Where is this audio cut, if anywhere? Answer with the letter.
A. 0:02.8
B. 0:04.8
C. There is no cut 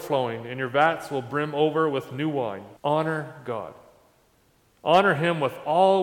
A